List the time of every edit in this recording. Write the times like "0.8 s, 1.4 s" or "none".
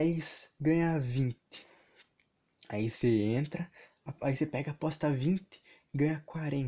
none